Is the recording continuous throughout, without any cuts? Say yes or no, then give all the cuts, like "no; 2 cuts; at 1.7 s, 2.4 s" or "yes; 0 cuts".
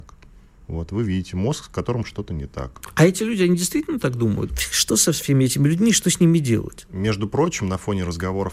no; 1 cut; at 4.5 s